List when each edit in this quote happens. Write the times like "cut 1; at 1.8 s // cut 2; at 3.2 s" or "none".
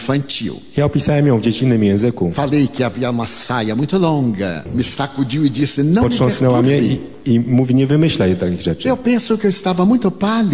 cut 1; at 4.7 s